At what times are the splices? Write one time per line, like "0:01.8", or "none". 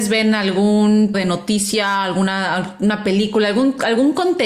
0:01.1